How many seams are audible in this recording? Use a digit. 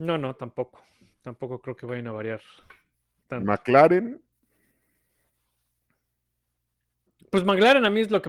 0